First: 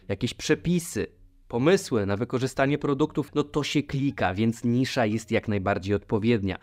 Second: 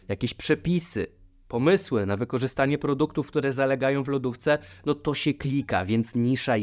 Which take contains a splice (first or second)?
first